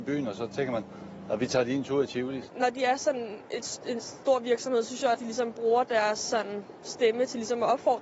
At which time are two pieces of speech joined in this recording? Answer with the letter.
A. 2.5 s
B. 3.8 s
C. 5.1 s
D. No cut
C